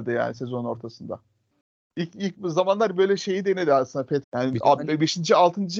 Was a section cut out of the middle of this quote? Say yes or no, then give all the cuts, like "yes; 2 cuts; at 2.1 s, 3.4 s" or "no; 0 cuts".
yes; 1 cut; at 4.2 s